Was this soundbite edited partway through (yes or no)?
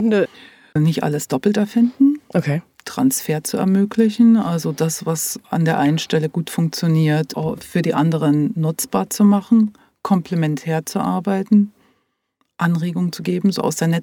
no